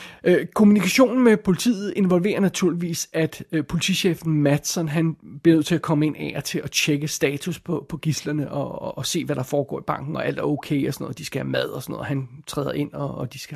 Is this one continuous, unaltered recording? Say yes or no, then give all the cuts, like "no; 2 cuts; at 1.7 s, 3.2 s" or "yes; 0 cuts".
yes; 0 cuts